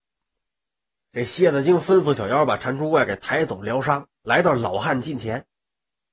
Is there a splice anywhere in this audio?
yes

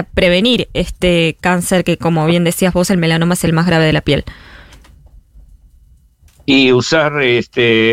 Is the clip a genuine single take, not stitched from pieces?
yes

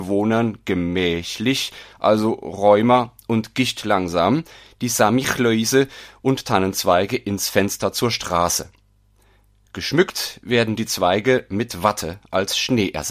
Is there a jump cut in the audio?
no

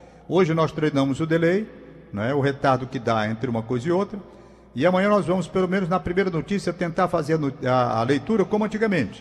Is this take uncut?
yes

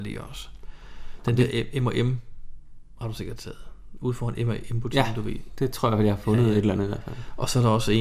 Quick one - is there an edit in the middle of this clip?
no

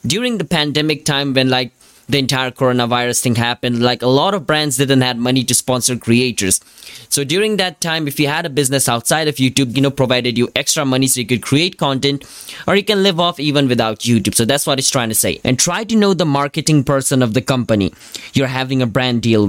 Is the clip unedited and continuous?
no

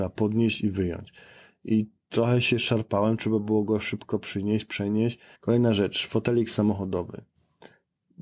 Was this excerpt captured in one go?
no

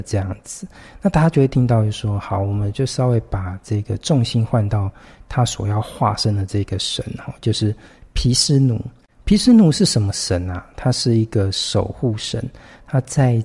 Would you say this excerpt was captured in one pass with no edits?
yes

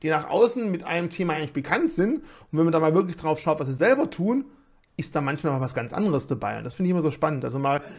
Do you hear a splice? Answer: no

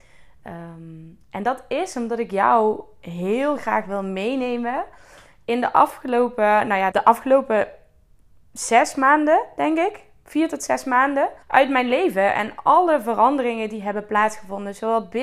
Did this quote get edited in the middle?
yes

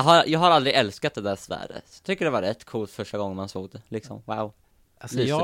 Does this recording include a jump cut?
no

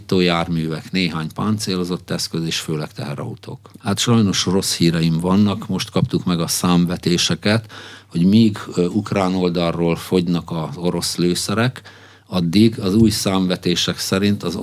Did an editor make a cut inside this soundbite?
yes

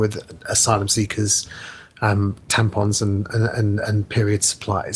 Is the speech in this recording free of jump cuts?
yes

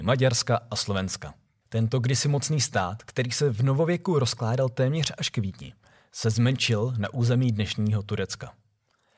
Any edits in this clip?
yes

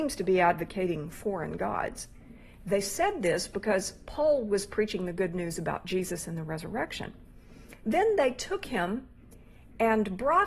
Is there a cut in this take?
no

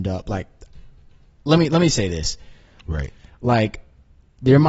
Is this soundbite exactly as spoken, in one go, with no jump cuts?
no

